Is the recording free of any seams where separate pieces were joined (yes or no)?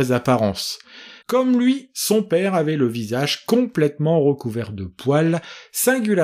no